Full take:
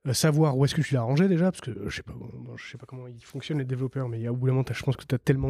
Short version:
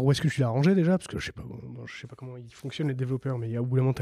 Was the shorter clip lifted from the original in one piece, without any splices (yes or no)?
no